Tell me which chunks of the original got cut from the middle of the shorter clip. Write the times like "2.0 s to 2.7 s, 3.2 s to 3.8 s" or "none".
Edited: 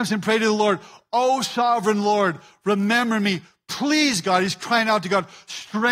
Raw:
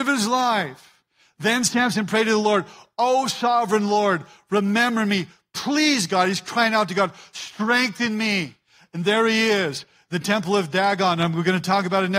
none

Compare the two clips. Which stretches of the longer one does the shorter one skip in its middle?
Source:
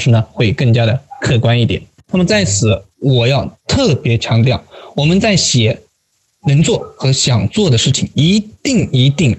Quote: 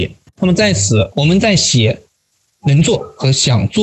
2.8 s to 4.9 s

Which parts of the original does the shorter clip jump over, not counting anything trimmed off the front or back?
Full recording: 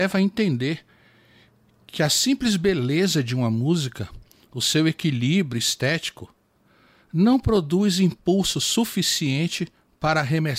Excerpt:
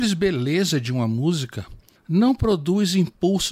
4.4 s to 7.0 s

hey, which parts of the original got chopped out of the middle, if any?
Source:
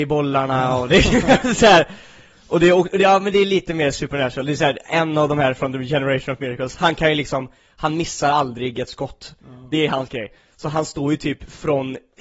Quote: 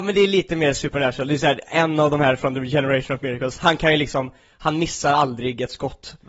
none

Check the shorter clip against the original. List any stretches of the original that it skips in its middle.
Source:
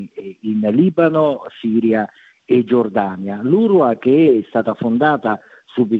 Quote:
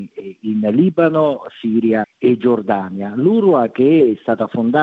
2.0 s to 2.3 s

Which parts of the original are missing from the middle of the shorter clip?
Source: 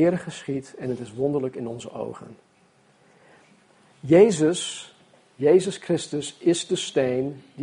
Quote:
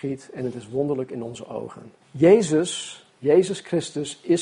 2.5 s to 3.9 s, 5.0 s to 5.3 s

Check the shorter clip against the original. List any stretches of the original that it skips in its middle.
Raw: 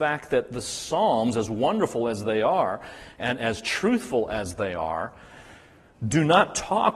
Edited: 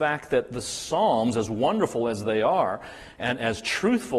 none

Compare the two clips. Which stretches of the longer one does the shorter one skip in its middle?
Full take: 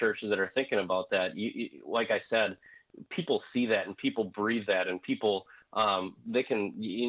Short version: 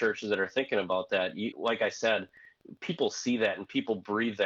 1.5 s to 1.8 s

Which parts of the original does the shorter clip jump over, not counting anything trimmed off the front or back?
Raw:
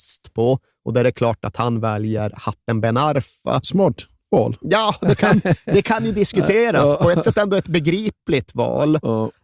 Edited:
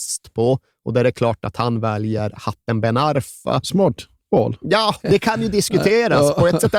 5.0 s to 5.6 s

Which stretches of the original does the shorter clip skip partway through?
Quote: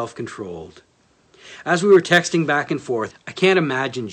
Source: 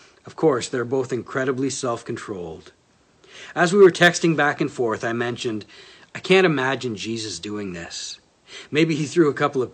5.0 s to 6.0 s

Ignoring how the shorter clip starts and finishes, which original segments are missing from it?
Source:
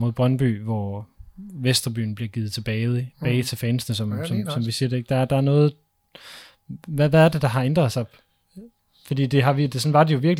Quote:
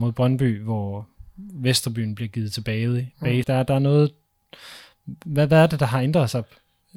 3.4 s to 5.1 s

